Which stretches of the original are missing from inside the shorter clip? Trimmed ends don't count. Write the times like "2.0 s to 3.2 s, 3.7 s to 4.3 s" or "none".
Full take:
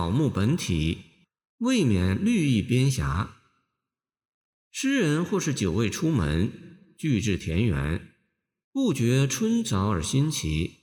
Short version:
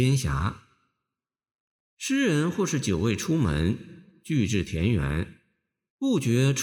none